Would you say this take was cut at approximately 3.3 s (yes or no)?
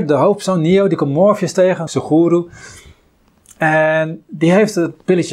no